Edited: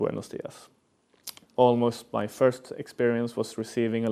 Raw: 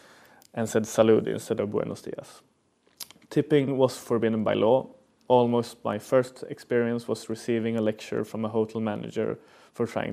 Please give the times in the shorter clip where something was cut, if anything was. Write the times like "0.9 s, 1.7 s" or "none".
1.4 s

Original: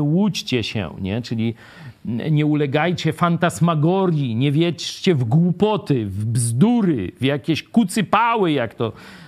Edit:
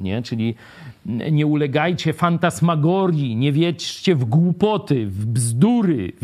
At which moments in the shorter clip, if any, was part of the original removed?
none

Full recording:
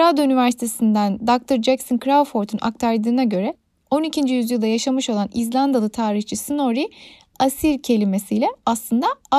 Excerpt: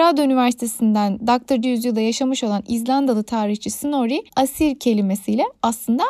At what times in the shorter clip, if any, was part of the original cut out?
1.6 s, 4.3 s

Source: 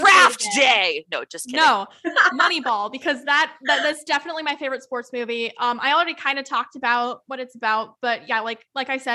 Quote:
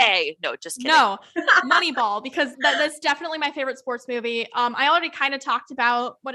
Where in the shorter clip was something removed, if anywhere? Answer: 2.5 s

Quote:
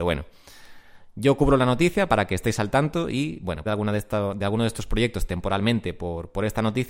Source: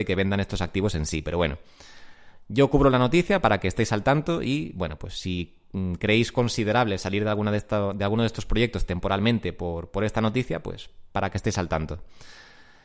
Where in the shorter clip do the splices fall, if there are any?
3.7 s

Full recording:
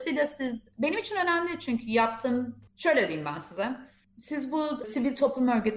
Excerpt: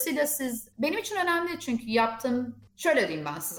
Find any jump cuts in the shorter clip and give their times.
none

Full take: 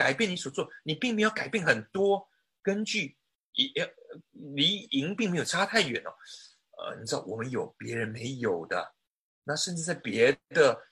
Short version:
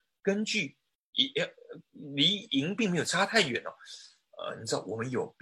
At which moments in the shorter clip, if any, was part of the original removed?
none

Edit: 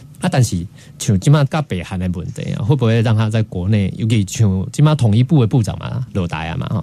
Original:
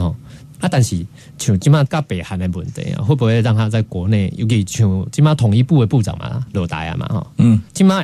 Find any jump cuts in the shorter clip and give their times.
none

